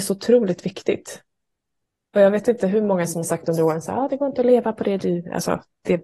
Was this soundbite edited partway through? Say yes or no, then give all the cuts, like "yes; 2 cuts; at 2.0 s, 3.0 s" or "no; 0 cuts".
no; 0 cuts